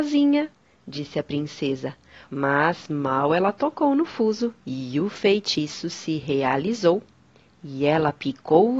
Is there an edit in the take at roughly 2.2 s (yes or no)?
yes